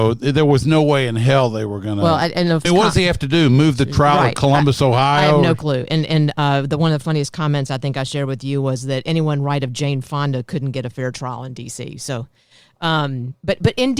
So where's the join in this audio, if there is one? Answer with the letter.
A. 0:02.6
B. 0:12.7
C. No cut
A